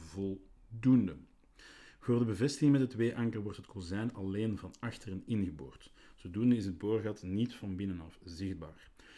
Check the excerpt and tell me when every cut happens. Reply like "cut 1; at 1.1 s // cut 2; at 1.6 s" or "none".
none